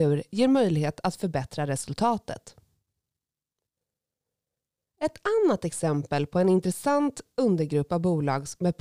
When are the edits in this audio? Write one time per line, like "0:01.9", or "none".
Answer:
none